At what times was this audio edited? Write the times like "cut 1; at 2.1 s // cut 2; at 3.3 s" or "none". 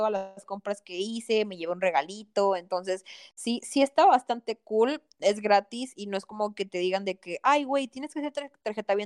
none

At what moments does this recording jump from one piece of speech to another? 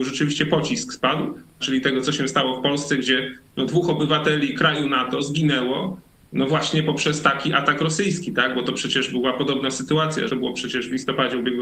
cut 1; at 1.6 s // cut 2; at 10.3 s

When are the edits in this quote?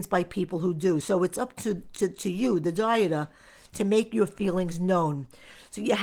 none

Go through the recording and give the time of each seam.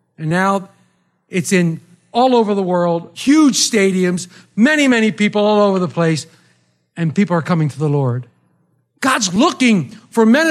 none

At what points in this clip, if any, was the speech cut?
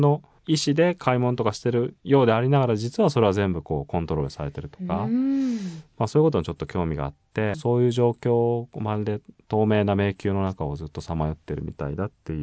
cut 1; at 7.5 s

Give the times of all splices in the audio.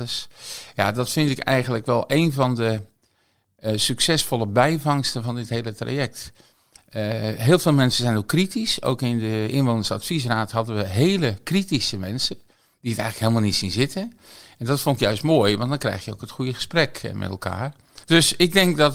cut 1; at 18.0 s

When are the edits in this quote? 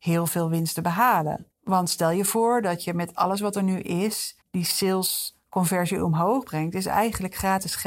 cut 1; at 1.5 s // cut 2; at 4.4 s

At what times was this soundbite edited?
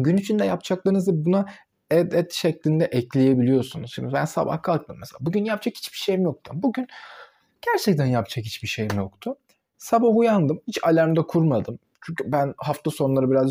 none

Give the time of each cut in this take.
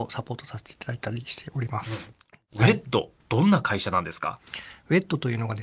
none

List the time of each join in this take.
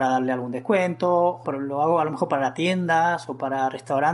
cut 1; at 1.4 s

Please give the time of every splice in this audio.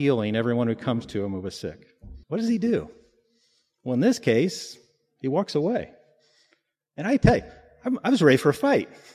cut 1; at 2.2 s

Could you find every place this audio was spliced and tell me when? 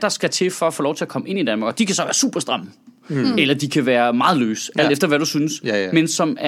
none

